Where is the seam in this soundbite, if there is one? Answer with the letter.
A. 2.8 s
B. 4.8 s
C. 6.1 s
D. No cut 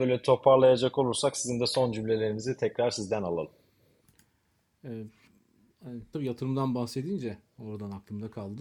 C